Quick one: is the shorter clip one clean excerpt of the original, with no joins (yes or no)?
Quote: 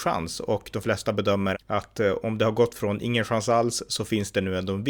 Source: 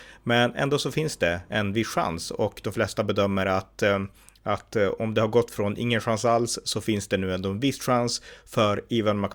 no